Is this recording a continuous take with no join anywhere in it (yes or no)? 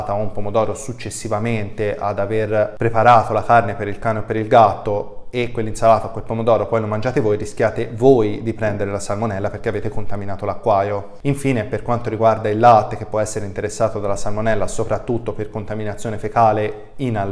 yes